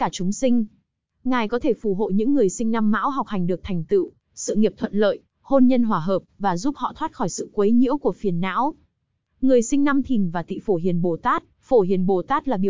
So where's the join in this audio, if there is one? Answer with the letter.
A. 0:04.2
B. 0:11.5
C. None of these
B